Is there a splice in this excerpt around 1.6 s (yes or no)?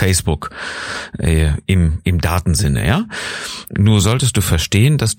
no